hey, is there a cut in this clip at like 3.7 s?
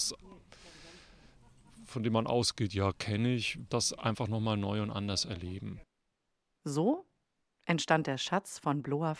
yes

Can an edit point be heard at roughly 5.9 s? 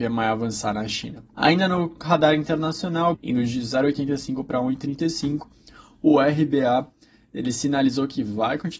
no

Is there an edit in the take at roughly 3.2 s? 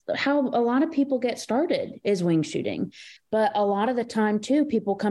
yes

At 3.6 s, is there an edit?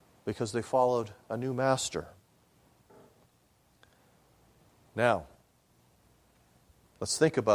no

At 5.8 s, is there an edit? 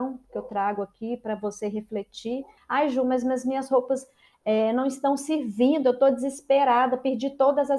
no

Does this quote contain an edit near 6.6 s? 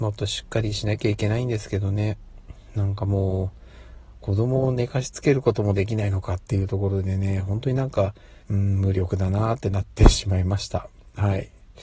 no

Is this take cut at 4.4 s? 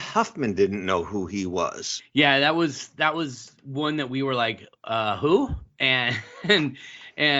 no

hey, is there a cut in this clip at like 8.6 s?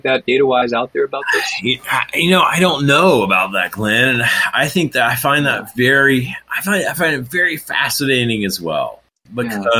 no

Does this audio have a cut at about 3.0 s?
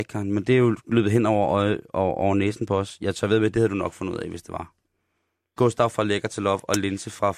no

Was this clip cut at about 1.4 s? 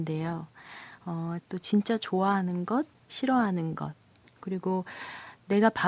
yes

